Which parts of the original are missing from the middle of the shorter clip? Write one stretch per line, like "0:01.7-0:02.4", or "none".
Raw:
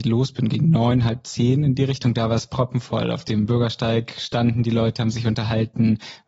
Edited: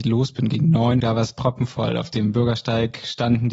0:01.0-0:02.1